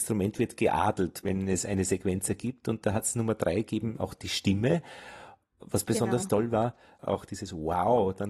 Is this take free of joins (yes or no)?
yes